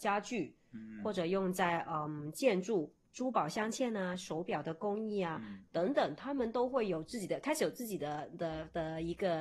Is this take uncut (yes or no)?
yes